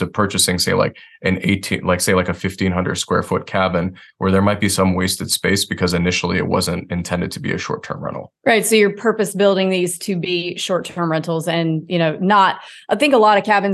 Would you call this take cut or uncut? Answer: cut